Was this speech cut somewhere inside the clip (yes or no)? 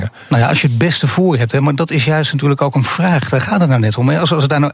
no